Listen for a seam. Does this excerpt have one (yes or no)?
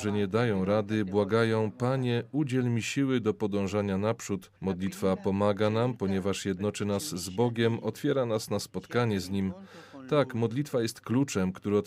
yes